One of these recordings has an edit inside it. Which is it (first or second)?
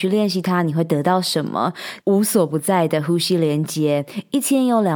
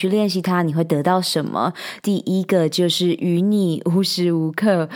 first